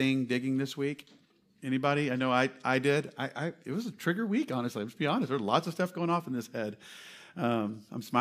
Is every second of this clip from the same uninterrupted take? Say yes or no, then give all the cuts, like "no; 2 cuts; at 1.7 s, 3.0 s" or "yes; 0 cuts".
yes; 0 cuts